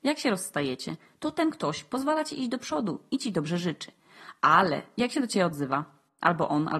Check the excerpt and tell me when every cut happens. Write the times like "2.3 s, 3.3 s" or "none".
none

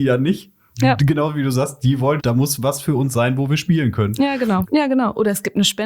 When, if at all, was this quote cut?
2.2 s, 4.6 s

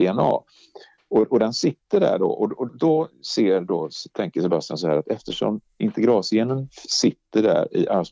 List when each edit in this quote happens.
2.7 s

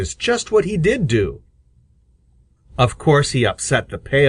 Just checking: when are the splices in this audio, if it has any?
none

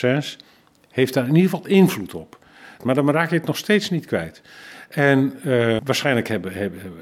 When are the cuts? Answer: 2.8 s, 5.8 s

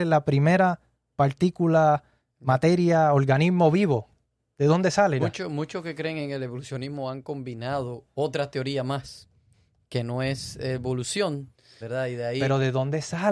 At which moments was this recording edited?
5.2 s, 11.8 s

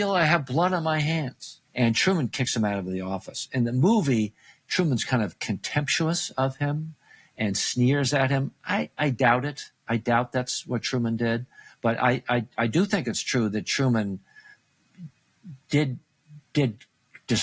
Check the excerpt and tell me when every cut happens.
1.6 s

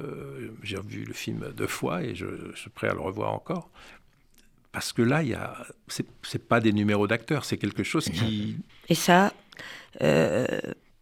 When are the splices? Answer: 8.7 s

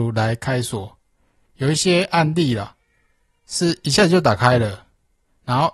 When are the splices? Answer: none

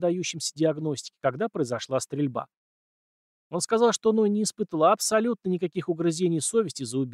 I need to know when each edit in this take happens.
none

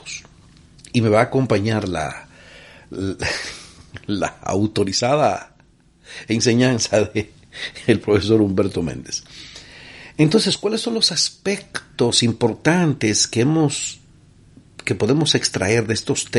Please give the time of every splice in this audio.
none

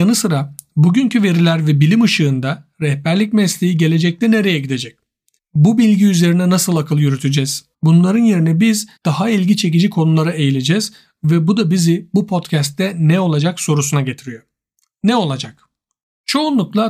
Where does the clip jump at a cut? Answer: 5.4 s, 7.7 s, 9.0 s

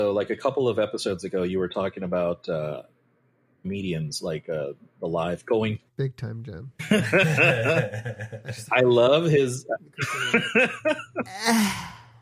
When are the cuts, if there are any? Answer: 5.9 s

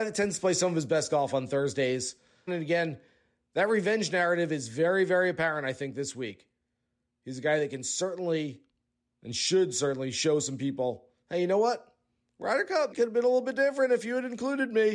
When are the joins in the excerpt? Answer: 2.5 s, 12.9 s

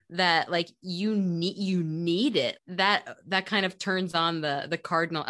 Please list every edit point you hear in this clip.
2.6 s

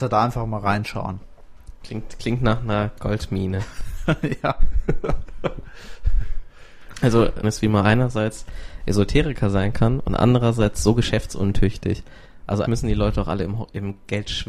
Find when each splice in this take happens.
7.4 s, 12.6 s

